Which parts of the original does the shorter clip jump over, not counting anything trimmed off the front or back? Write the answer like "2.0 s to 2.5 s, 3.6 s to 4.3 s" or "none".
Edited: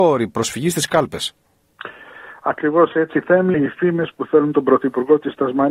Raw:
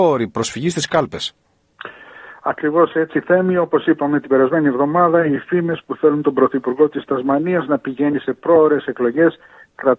3.5 s to 5.2 s